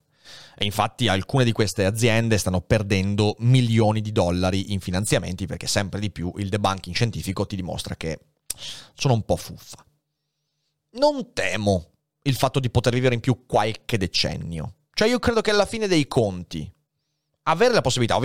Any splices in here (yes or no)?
no